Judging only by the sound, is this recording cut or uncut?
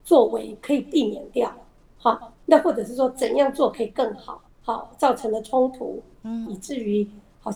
cut